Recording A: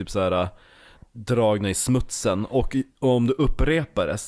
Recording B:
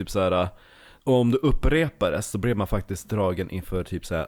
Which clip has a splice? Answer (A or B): B